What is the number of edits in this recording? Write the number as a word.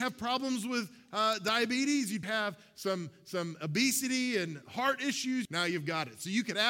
two